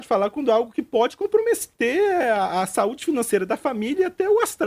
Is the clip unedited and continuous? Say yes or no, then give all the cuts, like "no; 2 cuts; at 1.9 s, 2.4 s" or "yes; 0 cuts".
yes; 0 cuts